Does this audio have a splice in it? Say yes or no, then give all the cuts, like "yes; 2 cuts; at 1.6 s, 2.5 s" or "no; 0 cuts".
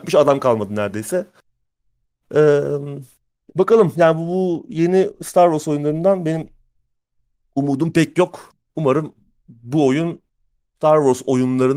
no; 0 cuts